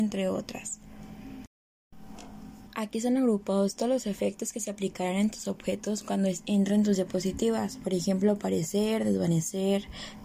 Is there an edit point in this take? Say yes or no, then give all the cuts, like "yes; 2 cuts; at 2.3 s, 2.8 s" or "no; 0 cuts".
yes; 1 cut; at 2.7 s